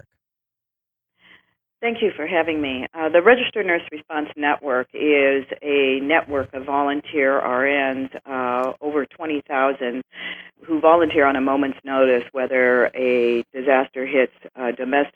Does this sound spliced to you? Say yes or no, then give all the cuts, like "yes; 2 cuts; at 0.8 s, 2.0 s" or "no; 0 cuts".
no; 0 cuts